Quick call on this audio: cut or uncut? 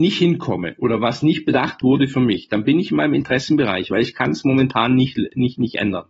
uncut